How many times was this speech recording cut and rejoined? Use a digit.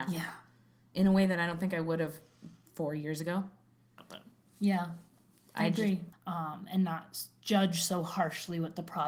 1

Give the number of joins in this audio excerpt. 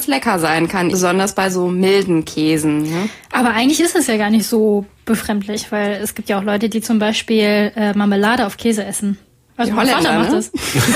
2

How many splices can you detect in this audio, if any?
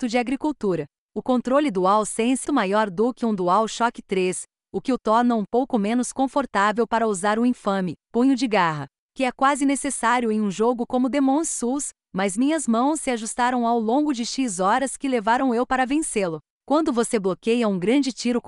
2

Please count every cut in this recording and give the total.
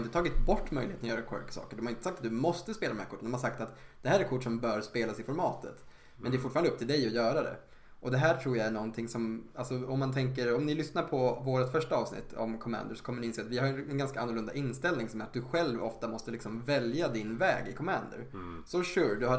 0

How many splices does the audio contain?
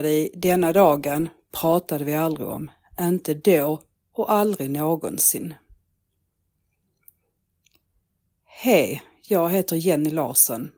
0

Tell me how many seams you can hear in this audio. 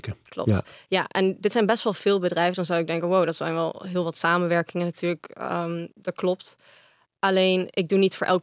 0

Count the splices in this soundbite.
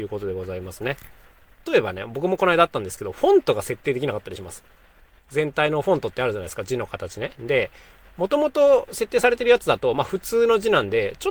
1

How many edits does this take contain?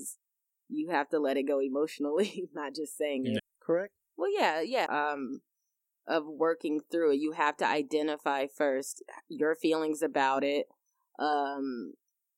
2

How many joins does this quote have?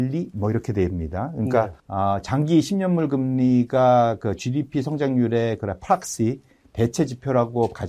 1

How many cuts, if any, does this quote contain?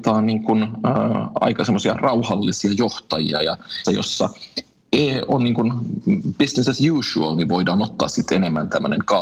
1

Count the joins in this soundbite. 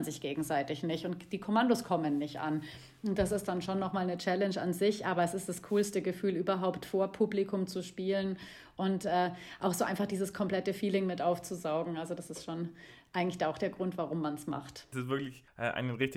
1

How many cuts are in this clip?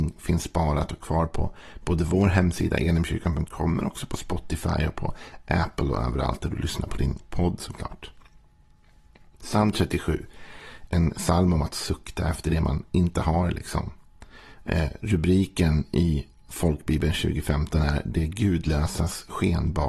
1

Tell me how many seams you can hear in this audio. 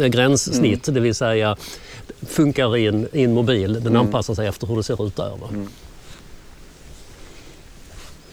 0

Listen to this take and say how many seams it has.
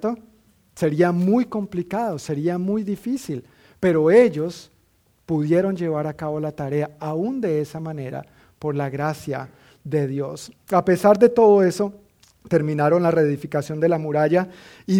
0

